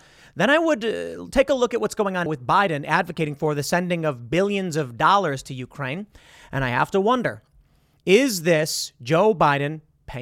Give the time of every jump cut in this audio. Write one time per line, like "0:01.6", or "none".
0:02.3